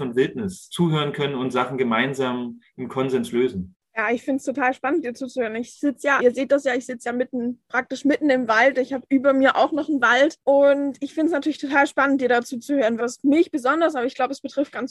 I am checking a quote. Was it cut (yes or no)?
yes